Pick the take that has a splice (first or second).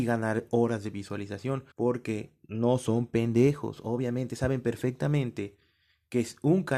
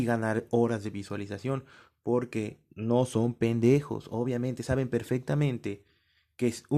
first